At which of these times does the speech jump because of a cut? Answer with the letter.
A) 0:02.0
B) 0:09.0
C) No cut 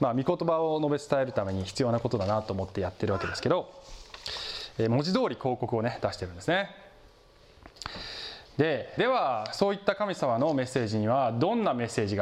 B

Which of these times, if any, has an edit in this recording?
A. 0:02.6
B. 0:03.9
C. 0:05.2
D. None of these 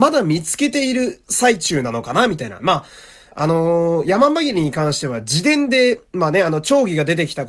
A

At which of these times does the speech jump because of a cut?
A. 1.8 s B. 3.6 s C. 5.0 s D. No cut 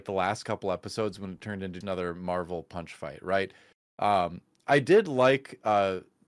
A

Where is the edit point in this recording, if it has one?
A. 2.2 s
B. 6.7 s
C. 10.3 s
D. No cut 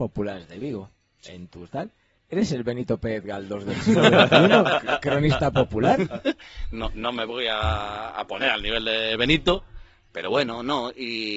D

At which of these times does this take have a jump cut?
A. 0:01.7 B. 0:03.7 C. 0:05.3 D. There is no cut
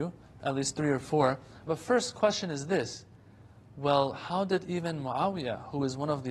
A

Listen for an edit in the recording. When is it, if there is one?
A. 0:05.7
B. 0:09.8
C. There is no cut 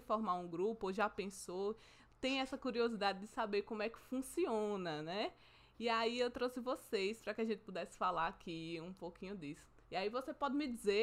B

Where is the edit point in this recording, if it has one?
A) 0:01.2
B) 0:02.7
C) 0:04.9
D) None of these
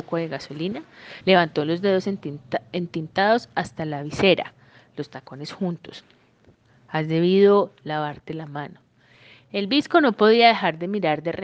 A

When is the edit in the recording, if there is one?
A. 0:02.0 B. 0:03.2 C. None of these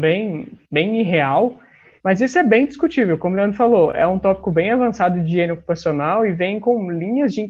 A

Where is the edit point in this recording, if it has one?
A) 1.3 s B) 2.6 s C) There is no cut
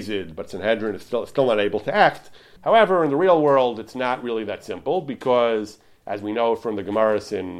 B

